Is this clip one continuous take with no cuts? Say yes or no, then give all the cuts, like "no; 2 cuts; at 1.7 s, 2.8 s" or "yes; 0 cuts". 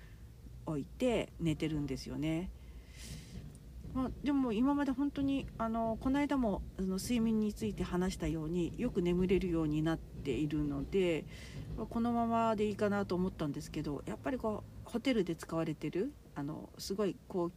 no; 1 cut; at 14.8 s